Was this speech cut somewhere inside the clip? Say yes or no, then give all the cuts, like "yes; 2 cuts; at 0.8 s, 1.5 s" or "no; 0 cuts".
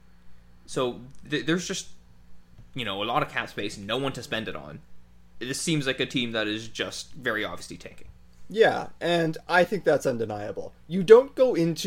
yes; 1 cut; at 1.3 s